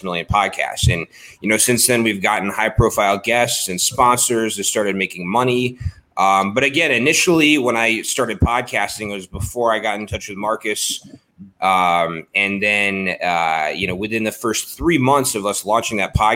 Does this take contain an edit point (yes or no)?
yes